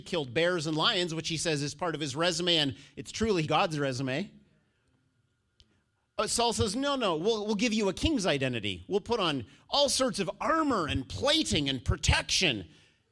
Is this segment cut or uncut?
cut